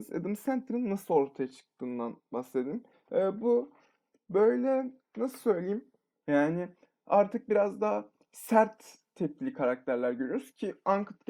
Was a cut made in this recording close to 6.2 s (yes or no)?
yes